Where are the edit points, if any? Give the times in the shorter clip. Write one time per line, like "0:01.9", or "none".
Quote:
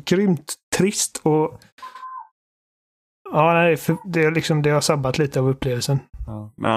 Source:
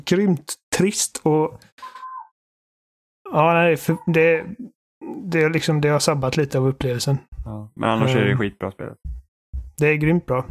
0:04.0